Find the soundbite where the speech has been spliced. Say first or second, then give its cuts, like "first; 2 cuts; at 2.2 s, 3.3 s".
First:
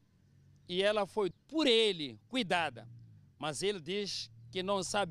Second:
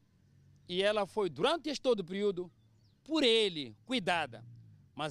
first; 1 cut; at 1.3 s